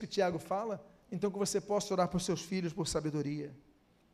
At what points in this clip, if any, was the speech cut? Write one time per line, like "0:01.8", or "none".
0:01.0

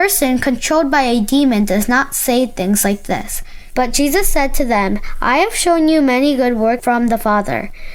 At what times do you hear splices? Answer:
0:03.7

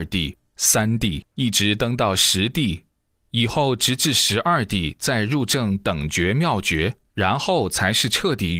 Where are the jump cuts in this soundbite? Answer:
0:07.1

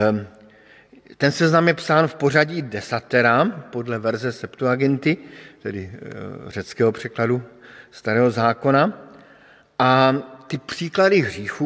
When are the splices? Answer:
none

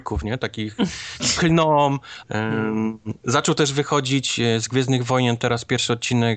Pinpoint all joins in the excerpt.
0:02.2

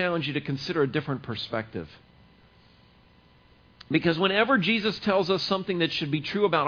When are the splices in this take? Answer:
none

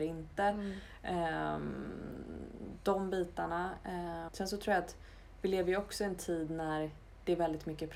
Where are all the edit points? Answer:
0:04.3

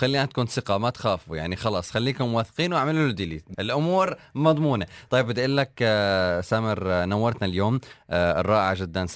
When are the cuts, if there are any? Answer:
0:03.5

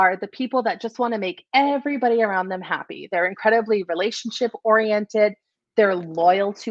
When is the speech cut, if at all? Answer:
none

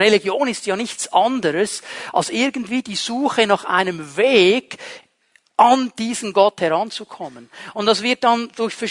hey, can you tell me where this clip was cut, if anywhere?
none

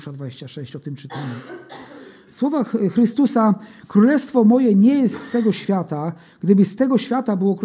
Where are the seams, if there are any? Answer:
none

